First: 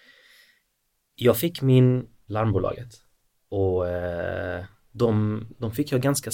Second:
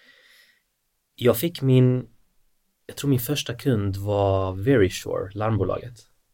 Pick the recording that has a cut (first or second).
first